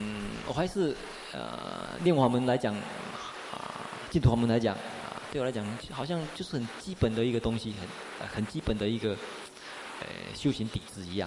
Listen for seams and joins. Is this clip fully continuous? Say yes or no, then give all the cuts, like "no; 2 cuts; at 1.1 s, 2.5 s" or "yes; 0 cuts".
yes; 0 cuts